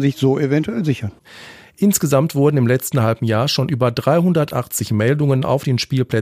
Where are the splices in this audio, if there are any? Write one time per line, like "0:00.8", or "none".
none